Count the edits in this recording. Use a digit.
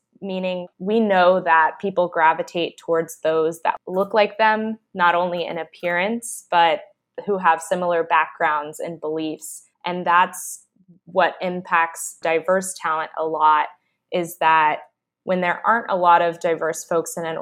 1